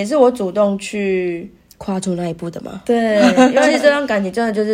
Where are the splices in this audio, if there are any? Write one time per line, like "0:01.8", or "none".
none